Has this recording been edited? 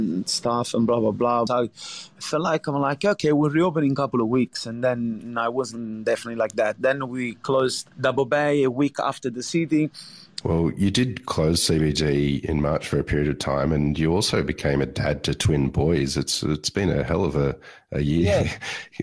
yes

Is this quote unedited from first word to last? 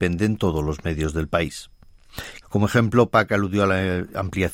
no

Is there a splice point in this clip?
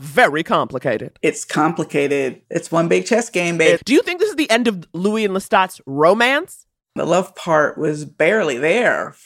yes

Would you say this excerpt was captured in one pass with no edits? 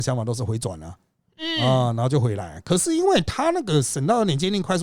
yes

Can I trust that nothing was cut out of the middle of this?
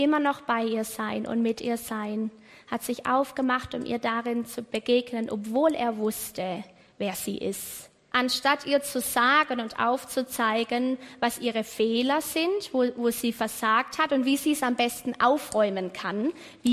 no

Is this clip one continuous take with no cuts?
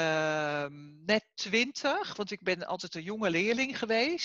yes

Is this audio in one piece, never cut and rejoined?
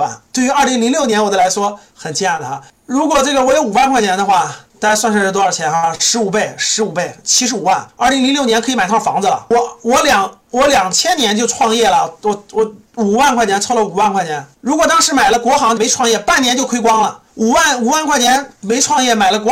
no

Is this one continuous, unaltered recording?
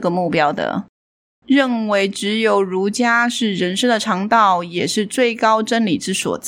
no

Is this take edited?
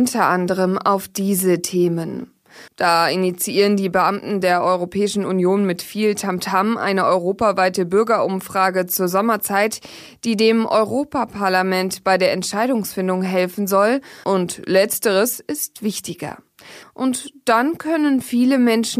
yes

